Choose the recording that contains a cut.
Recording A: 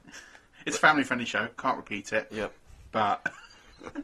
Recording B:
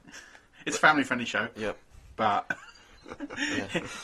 B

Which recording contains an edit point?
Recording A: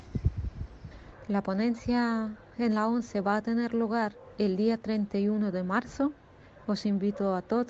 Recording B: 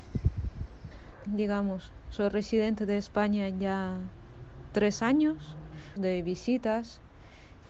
B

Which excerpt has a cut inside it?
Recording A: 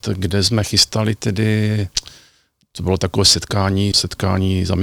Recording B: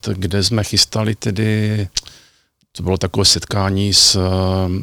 A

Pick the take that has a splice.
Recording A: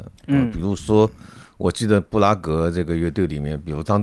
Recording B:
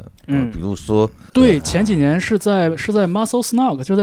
B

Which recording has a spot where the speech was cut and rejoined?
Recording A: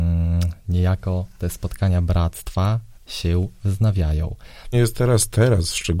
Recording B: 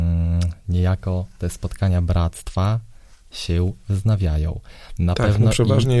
A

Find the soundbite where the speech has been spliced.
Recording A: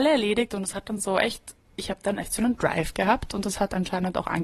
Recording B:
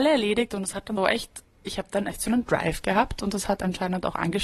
B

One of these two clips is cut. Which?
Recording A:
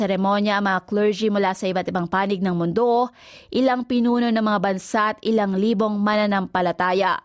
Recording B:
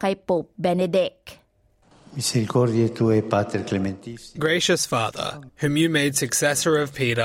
B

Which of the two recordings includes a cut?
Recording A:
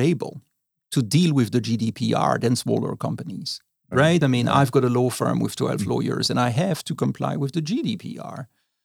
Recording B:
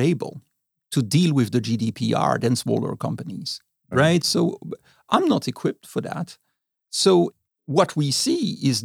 B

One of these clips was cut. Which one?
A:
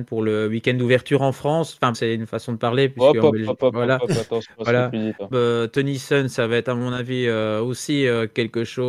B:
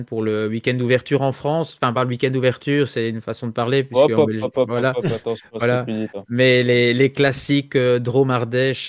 A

